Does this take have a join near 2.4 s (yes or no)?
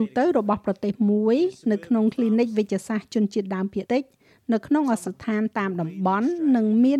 no